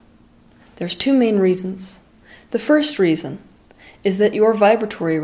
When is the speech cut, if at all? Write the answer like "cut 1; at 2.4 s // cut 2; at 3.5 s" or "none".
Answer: none